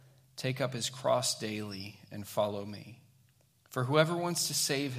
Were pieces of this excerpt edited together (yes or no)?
no